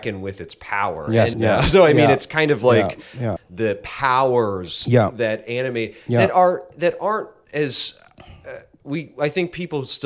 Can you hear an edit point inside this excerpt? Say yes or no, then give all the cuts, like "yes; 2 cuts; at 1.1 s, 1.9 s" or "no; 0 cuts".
yes; 2 cuts; at 1.3 s, 3.4 s